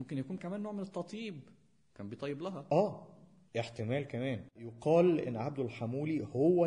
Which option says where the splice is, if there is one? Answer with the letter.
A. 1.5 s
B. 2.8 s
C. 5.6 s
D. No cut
D